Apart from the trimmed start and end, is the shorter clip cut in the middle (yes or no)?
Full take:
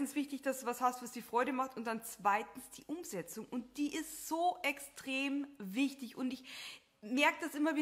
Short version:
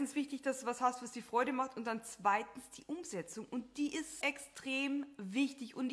yes